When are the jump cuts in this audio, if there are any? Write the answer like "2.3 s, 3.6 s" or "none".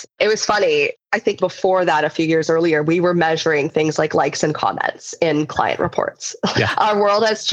1.4 s, 6.5 s